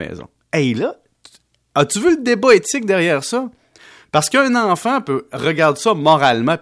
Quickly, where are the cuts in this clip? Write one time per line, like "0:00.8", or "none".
none